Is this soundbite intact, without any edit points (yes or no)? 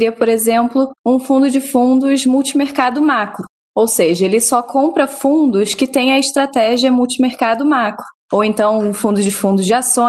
yes